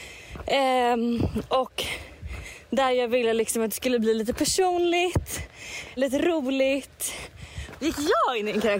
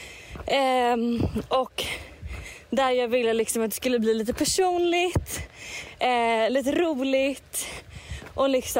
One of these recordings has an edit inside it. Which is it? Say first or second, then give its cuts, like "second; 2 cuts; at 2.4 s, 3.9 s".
first; 2 cuts; at 6.0 s, 7.8 s